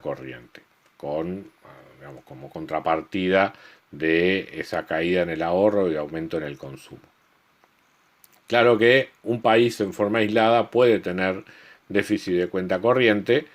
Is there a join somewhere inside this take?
no; 0 cuts

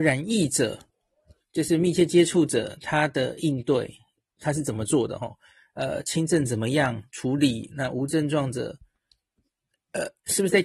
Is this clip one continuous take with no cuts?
yes; 0 cuts

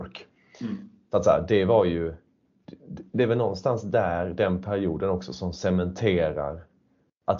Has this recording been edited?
no; 0 cuts

